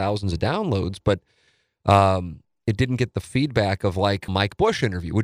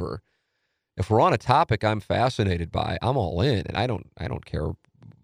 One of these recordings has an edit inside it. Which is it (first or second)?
first